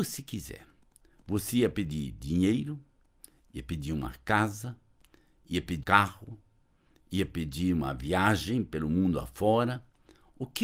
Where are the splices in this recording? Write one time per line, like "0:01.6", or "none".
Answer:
0:05.8